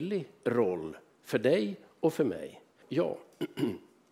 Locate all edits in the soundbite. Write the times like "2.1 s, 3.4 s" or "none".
2.8 s